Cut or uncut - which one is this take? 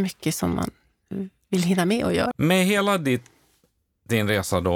cut